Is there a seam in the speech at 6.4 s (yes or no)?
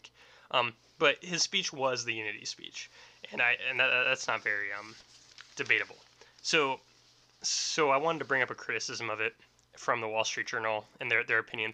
yes